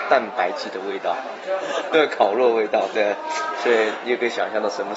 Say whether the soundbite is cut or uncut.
cut